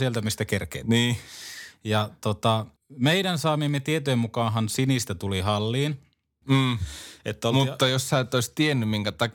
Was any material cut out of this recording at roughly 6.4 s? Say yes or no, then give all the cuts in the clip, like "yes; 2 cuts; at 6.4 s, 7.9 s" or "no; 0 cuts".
yes; 2 cuts; at 2.8 s, 6.4 s